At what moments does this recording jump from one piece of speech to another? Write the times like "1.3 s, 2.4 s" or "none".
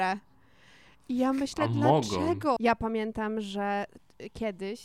2.6 s